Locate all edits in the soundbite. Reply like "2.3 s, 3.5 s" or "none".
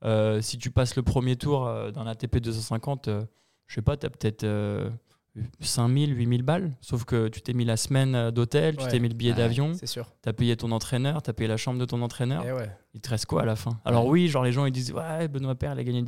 none